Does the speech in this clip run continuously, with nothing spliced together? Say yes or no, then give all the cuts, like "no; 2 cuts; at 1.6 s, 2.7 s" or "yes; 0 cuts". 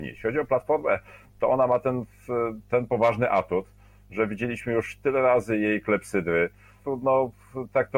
no; 1 cut; at 6.8 s